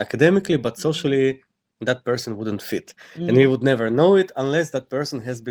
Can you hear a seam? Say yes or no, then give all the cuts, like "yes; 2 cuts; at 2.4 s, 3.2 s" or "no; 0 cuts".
no; 0 cuts